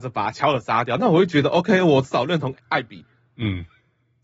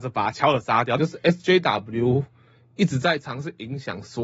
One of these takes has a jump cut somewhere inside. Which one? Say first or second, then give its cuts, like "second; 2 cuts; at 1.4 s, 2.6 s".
second; 1 cut; at 1.0 s